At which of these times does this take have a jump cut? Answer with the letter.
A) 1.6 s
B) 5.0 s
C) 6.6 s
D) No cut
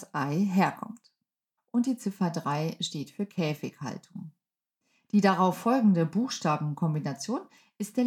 A